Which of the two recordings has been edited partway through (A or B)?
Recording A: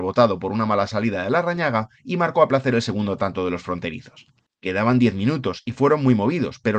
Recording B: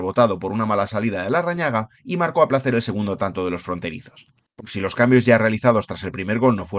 B